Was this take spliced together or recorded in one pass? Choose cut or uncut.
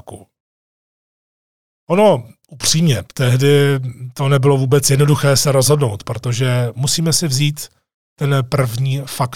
uncut